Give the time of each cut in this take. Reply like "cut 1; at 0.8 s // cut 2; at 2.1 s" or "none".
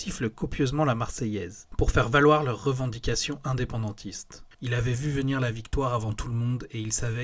cut 1; at 4.5 s